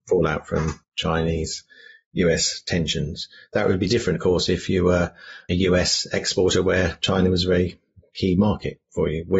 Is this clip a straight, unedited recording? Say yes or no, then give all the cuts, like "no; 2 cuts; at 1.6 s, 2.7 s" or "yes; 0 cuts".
yes; 0 cuts